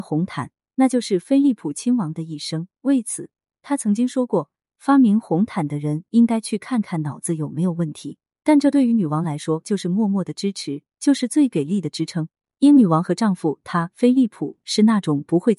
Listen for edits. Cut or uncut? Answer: uncut